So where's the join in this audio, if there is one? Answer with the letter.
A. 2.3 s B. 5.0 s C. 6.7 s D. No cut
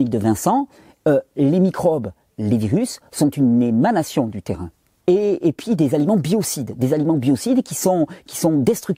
B